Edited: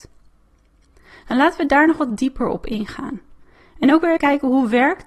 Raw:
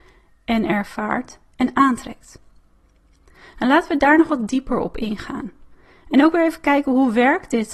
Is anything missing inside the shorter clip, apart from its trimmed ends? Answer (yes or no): yes